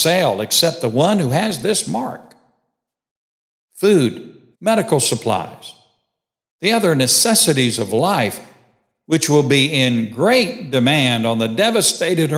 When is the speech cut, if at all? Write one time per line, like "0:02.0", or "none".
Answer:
0:04.5